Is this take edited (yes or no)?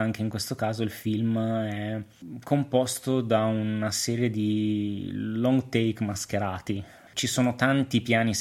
yes